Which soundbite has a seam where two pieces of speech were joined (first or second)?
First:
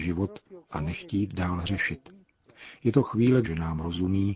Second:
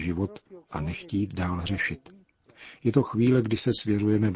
first